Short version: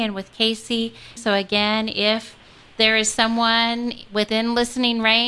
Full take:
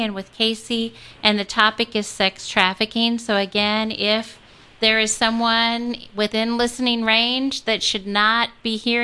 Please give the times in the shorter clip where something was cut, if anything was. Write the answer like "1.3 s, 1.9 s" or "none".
1.2 s